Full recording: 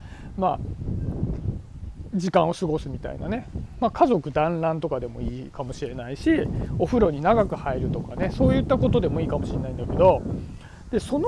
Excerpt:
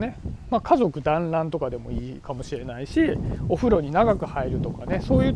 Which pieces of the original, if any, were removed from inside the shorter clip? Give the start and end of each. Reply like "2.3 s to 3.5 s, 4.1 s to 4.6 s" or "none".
none